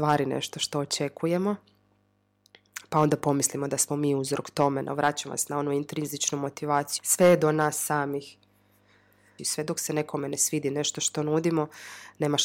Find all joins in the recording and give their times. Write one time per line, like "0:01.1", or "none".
0:07.0
0:09.4